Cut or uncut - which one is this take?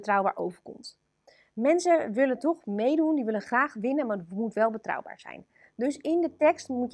uncut